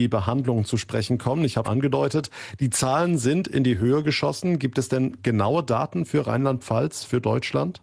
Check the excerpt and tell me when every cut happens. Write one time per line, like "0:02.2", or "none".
0:01.6